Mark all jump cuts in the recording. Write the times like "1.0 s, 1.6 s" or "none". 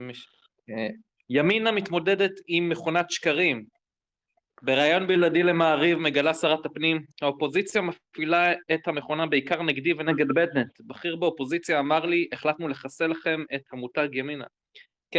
1.2 s